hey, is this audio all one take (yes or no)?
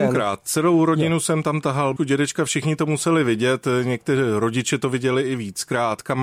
no